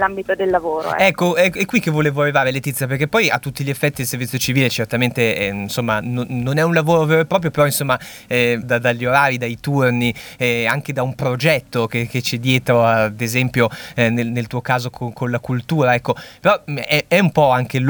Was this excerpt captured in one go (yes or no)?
no